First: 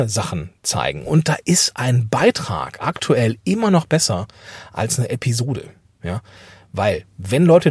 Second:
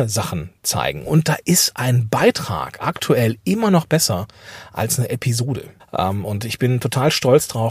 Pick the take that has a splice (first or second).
second